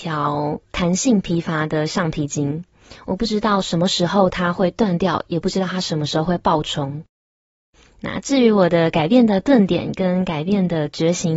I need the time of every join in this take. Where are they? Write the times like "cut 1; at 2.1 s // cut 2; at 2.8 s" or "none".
none